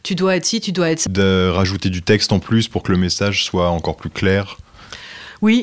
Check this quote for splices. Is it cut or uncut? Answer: cut